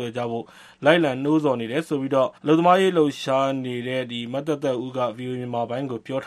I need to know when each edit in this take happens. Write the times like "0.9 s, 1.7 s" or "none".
2.4 s